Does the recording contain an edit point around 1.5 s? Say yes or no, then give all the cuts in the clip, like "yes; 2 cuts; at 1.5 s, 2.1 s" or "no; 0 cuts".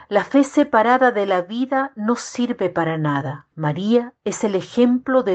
no; 1 cut; at 3.5 s